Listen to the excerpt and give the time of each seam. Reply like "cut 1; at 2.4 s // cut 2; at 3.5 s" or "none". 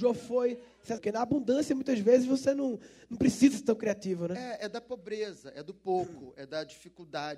cut 1; at 1.0 s